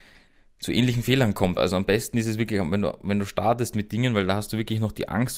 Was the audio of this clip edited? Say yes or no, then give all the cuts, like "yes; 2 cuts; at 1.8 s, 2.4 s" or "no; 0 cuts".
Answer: yes; 1 cut; at 1.6 s